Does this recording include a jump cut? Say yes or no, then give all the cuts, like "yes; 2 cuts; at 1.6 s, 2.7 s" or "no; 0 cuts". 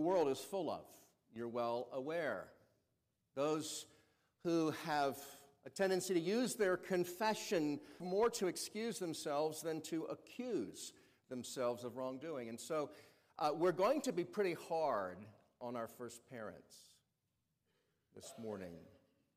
yes; 1 cut; at 8.0 s